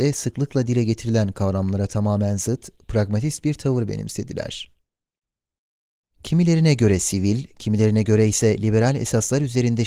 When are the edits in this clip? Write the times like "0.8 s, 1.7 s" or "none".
6.1 s, 7.5 s

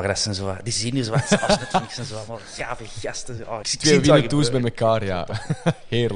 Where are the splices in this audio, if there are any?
3.6 s

